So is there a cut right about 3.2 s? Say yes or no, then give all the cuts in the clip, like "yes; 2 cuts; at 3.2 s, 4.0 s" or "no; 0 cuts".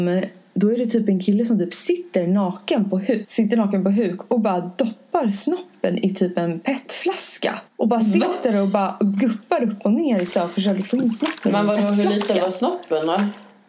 yes; 2 cuts; at 3.2 s, 7.7 s